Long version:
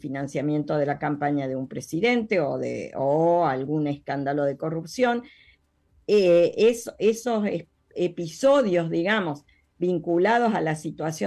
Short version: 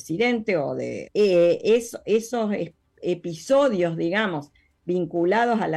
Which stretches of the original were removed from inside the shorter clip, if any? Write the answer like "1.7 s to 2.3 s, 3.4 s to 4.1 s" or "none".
2.9 s to 6.0 s